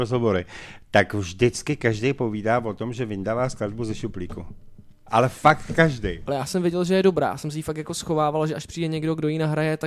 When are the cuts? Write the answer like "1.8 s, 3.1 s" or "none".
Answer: 6.3 s